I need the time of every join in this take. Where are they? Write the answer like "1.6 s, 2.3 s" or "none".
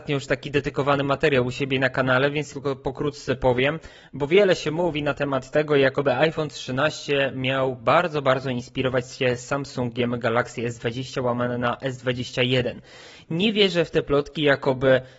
2.5 s

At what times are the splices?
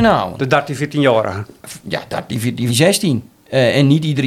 2.7 s

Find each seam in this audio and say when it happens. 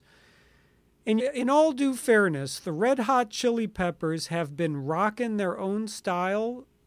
1.2 s

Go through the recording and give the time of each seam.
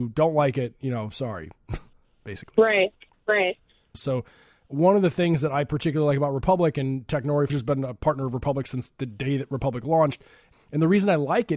3.9 s, 7.5 s, 10.5 s

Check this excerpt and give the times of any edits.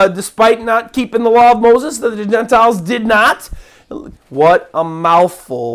4.1 s

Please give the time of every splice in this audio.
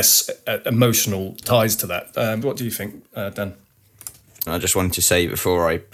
2.4 s, 4.5 s

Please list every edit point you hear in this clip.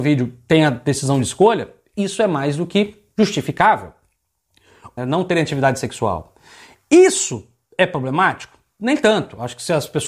5.0 s

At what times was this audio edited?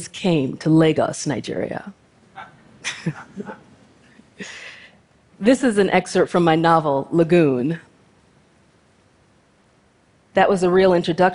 10.3 s

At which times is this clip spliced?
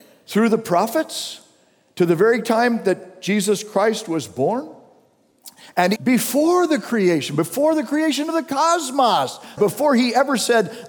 6.0 s, 9.6 s

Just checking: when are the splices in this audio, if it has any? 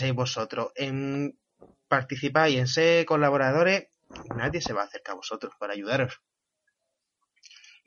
none

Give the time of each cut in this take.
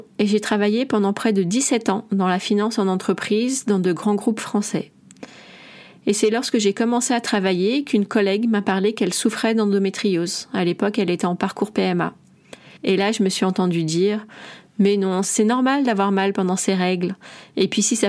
12.8 s, 15.2 s

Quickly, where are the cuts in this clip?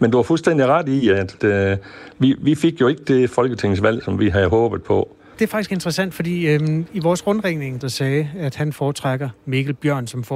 1.4 s, 5.3 s, 7.8 s

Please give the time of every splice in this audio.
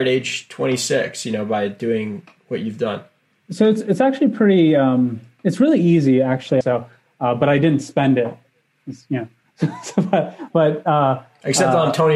6.6 s

